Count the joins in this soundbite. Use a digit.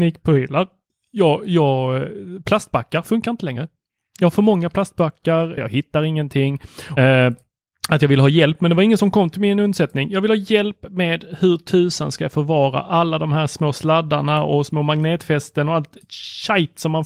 2